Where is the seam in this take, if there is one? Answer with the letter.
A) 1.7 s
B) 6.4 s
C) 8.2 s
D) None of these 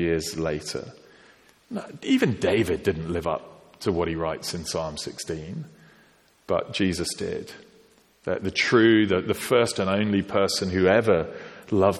D